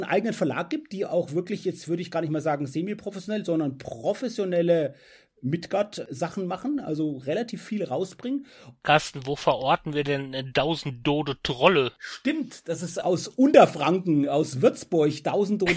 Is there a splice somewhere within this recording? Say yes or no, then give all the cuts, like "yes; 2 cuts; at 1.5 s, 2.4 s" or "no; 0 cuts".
yes; 1 cut; at 8.8 s